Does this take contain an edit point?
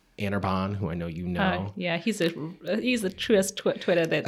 no; 0 cuts

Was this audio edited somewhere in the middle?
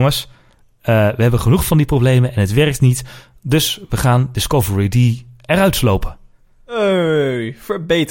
no; 0 cuts

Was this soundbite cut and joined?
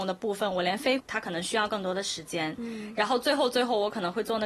yes; 1 cut; at 1.0 s

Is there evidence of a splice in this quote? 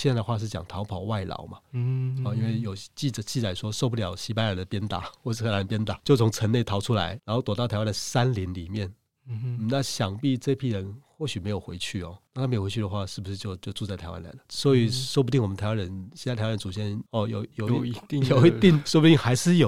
no; 0 cuts

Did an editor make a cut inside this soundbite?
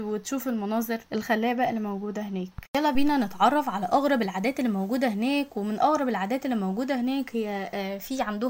yes; 1 cut; at 1.1 s

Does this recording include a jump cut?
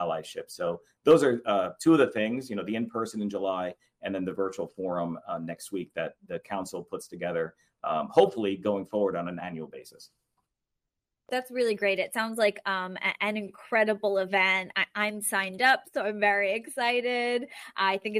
no; 0 cuts

